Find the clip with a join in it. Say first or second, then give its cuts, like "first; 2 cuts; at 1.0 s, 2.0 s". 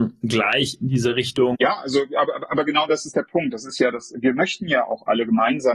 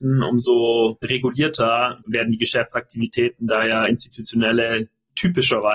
first; 1 cut; at 1.5 s